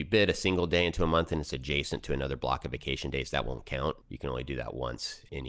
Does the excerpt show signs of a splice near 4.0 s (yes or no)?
yes